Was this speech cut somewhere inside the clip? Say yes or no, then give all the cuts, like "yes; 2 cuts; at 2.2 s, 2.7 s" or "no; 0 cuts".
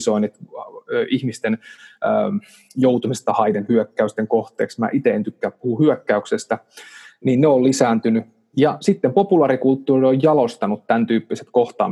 no; 0 cuts